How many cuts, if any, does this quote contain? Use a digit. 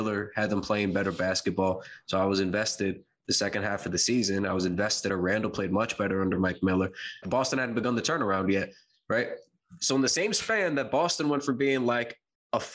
2